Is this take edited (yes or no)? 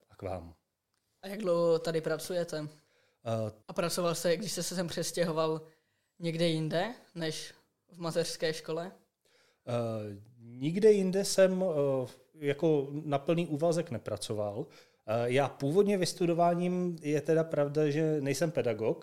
yes